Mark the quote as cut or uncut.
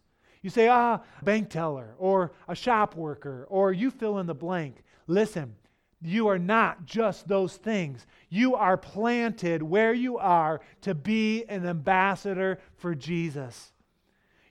cut